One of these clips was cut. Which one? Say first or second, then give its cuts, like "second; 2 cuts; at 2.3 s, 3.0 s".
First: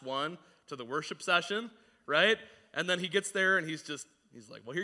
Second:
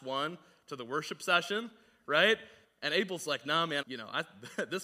second; 2 cuts; at 2.6 s, 3.8 s